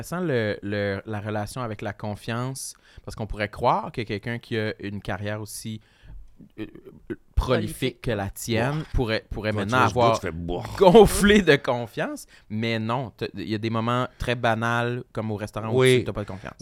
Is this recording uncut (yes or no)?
yes